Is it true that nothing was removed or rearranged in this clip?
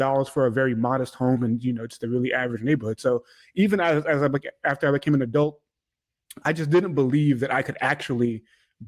yes; 0 cuts

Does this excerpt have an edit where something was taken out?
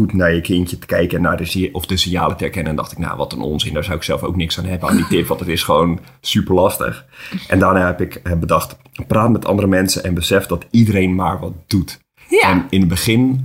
no; 0 cuts

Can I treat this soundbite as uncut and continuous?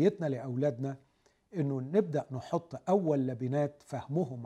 yes; 0 cuts

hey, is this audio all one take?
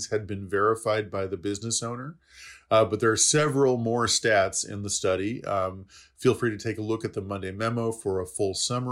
yes; 0 cuts

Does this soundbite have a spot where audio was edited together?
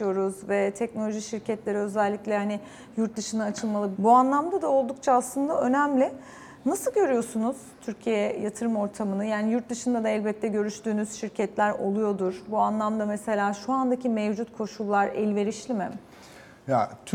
yes; 1 cut; at 3.9 s

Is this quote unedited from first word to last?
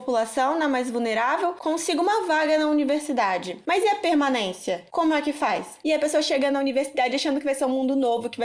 no; 1 cut; at 5.8 s

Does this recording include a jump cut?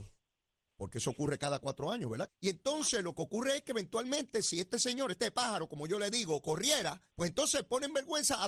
yes; 2 cuts; at 2.3 s, 7.1 s

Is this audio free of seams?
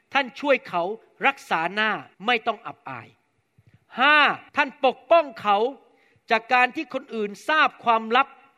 no; 2 cuts; at 2.1 s, 4.5 s

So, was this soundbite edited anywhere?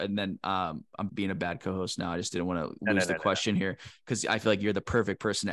yes; 1 cut; at 1.1 s

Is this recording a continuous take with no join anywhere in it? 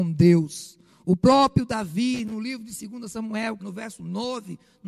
no; 1 cut; at 3.6 s

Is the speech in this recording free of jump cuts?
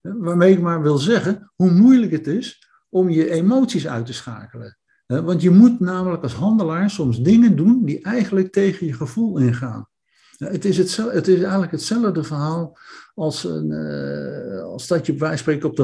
yes; 0 cuts

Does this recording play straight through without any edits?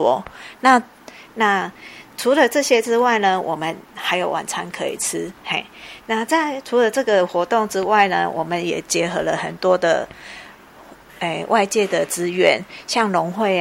no; 2 cuts; at 1.3 s, 5.4 s

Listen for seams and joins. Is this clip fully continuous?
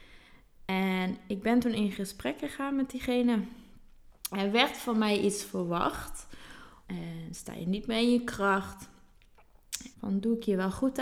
no; 3 cuts; at 4.3 s, 6.8 s, 9.9 s

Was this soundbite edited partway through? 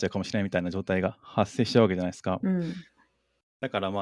yes; 1 cut; at 2.4 s

